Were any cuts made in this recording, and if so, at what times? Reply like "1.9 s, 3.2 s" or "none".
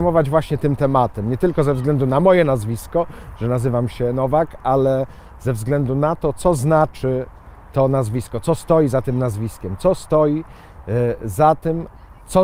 none